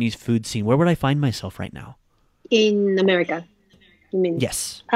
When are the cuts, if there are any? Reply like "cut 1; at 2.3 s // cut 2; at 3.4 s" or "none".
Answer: none

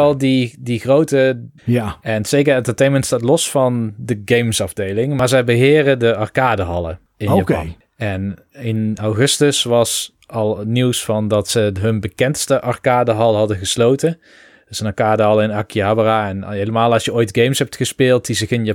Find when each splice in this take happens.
cut 1; at 1.6 s

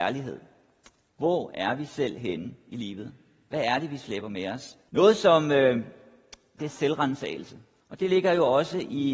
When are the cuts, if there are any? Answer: cut 1; at 4.9 s // cut 2; at 6.6 s // cut 3; at 7.8 s

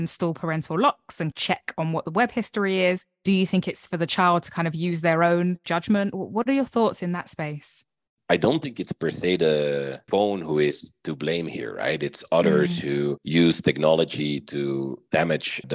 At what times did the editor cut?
none

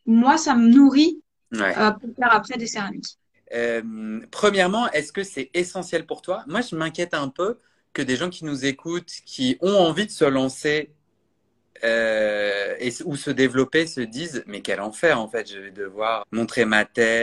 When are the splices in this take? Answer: cut 1; at 3.3 s // cut 2; at 16.2 s

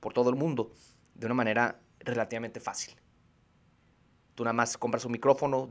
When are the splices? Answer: none

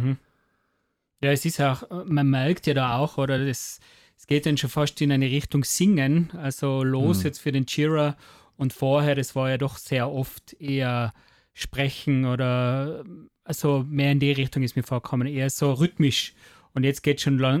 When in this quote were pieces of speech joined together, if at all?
none

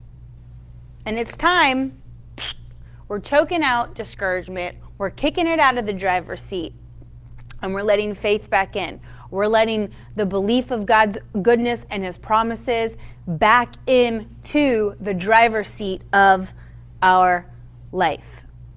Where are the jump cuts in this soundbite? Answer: none

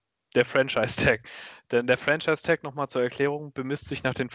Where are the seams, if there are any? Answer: none

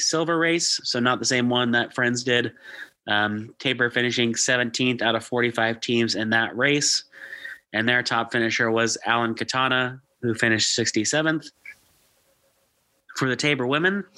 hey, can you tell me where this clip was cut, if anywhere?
none

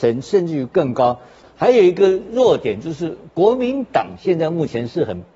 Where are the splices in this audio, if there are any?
cut 1; at 1.4 s

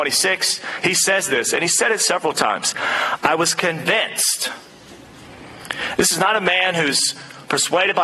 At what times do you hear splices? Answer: none

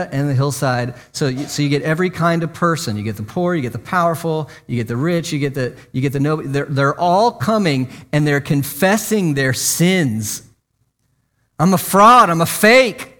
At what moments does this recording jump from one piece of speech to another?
none

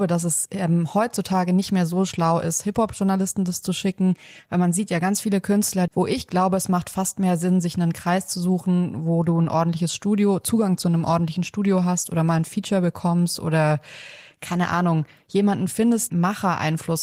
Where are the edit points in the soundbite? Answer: cut 1; at 5.9 s // cut 2; at 16.1 s

